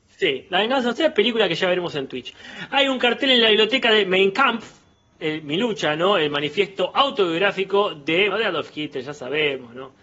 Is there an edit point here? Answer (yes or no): yes